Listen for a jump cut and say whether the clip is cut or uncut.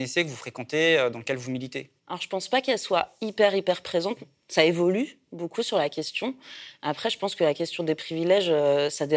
cut